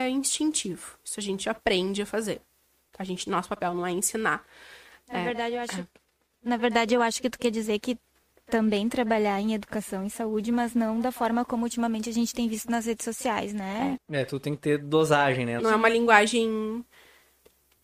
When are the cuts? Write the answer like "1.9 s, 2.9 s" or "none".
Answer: 14.0 s, 15.6 s